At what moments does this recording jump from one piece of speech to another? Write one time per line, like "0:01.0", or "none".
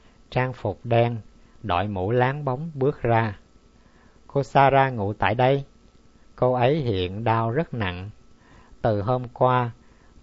0:06.2